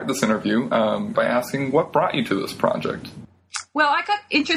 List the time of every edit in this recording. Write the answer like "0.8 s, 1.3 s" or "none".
1.1 s